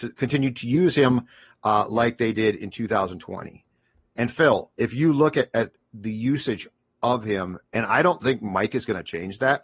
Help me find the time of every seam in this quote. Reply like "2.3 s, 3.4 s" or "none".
4.1 s